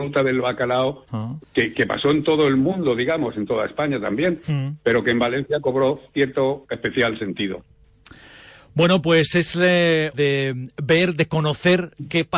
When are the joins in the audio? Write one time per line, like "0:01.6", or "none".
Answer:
0:01.4
0:10.1